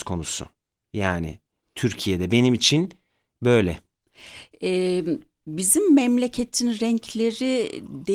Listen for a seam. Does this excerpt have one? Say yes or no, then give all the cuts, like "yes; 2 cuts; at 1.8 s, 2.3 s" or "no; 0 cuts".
no; 0 cuts